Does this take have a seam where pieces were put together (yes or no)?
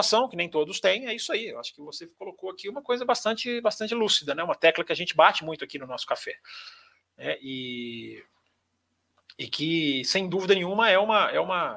no